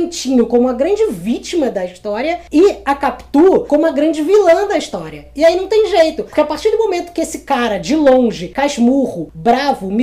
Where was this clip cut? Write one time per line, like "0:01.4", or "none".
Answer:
none